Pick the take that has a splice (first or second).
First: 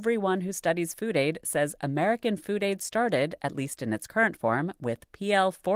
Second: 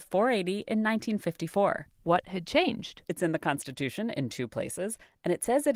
second